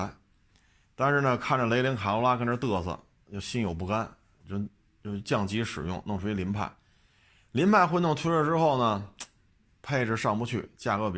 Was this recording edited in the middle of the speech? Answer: no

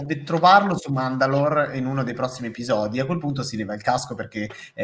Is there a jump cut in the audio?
no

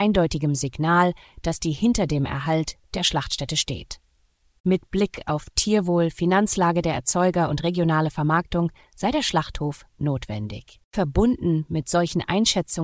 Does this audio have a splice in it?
yes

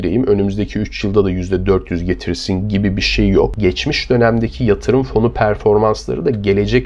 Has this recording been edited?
yes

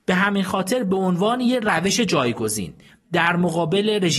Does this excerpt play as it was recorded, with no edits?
yes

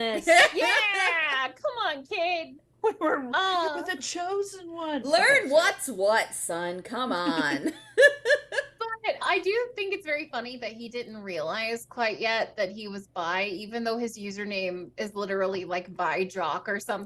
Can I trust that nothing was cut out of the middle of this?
yes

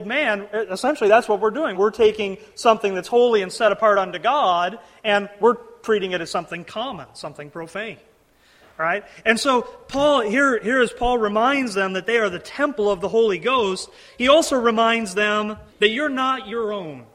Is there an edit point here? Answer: yes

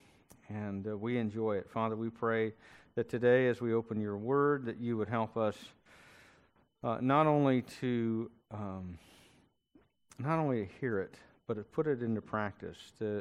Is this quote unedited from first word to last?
yes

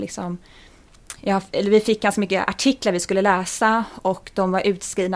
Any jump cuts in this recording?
no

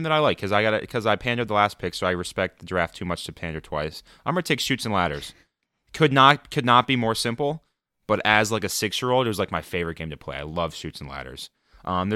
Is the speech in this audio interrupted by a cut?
no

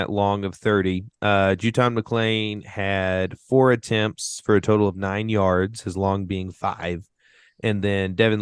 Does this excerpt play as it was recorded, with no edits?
yes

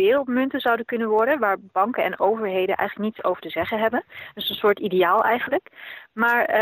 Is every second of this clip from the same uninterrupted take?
yes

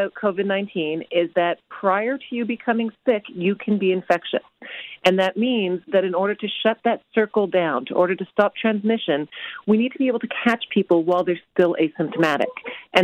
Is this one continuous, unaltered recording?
yes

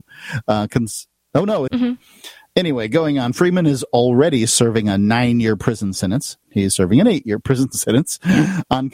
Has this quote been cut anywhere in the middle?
yes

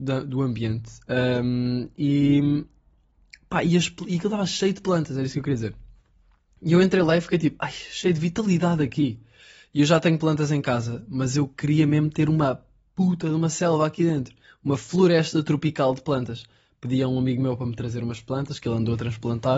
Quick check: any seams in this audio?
no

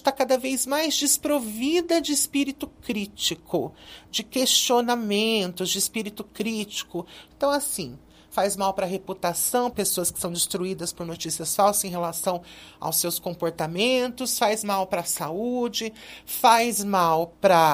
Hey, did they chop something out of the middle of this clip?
yes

